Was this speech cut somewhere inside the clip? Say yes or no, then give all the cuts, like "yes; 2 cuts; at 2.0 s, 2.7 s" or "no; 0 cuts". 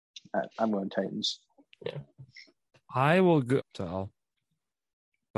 yes; 1 cut; at 3.6 s